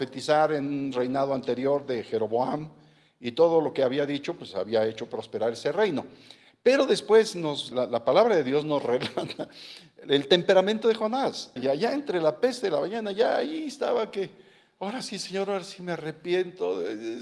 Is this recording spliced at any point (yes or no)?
yes